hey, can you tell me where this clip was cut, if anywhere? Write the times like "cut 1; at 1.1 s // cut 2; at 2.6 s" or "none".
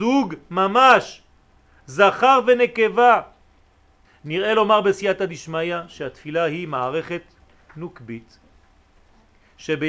cut 1; at 4.0 s